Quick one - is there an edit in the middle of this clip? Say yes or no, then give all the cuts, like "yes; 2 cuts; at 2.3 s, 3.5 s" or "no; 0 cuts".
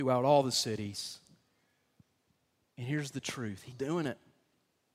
yes; 1 cut; at 3.7 s